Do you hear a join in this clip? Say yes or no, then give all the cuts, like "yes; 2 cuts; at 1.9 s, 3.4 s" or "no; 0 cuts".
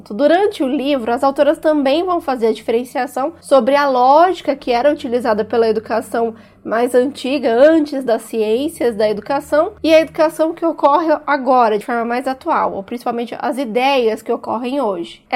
no; 0 cuts